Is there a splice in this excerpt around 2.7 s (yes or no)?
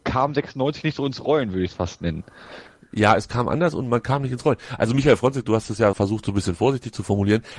no